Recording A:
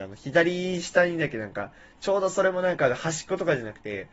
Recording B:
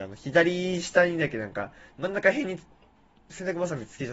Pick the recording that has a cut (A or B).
B